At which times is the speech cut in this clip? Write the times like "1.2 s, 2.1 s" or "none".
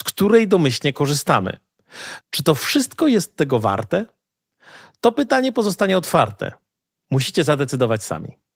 2.2 s